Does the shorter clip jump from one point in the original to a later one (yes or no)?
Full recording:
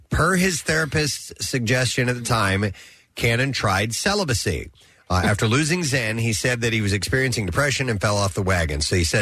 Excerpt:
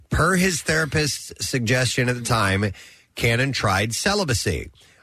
no